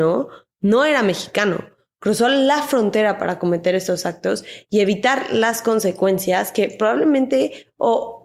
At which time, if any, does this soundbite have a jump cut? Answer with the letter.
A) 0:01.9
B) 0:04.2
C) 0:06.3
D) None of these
D